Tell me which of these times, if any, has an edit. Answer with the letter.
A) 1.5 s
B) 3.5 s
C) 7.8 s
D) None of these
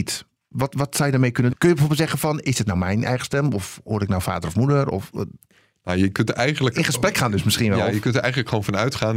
A